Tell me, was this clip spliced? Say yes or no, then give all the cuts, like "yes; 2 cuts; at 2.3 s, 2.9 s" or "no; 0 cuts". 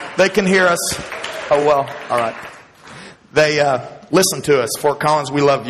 no; 0 cuts